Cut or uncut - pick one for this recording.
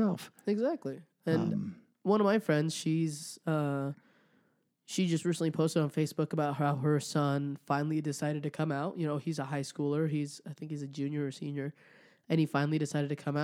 uncut